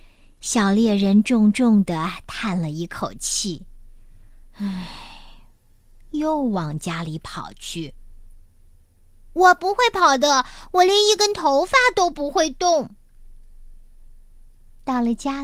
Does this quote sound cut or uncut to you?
uncut